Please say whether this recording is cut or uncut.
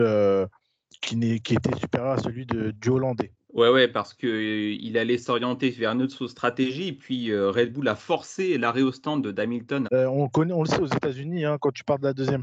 cut